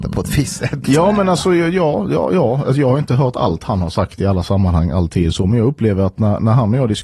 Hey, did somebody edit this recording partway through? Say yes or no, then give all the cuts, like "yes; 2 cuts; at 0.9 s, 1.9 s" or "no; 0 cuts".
no; 0 cuts